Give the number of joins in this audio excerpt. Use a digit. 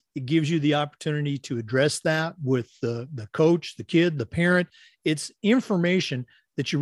0